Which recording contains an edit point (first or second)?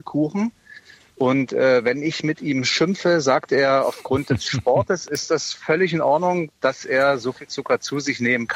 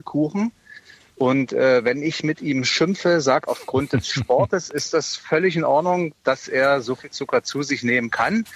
second